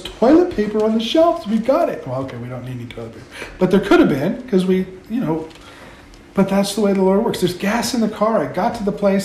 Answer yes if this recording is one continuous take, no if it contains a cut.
yes